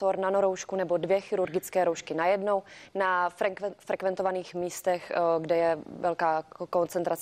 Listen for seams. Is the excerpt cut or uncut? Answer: uncut